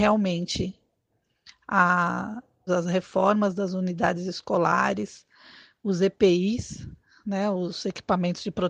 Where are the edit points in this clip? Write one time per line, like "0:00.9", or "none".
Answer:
0:02.7